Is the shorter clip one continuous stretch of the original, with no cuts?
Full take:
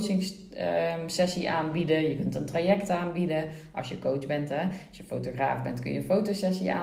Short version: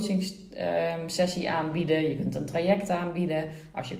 yes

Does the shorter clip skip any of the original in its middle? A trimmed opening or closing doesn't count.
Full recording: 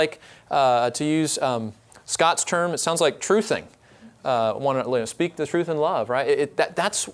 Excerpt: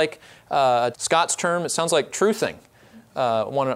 yes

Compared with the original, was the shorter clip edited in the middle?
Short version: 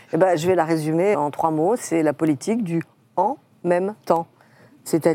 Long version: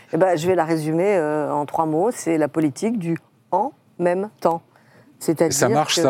yes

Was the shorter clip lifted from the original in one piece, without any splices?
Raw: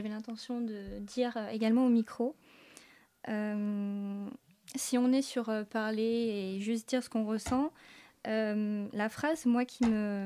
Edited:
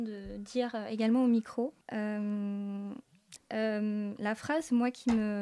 no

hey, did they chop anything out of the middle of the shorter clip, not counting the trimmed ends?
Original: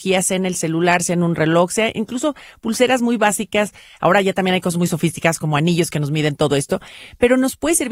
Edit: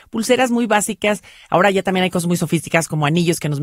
no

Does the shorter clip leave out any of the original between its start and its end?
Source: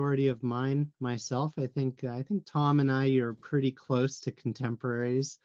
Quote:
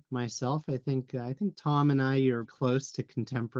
yes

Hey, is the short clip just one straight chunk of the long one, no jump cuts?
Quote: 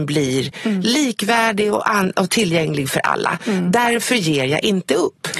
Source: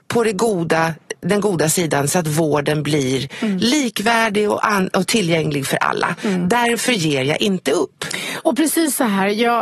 yes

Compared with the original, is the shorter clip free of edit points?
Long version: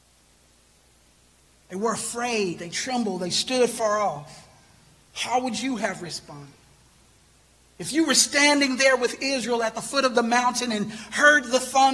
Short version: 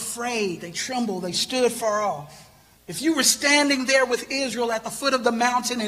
no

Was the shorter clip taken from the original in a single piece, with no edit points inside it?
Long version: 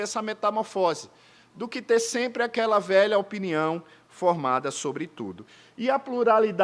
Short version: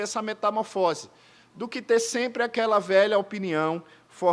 yes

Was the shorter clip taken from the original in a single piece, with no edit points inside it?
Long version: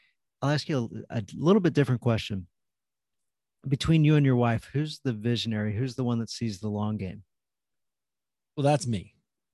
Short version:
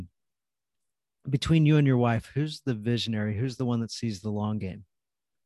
yes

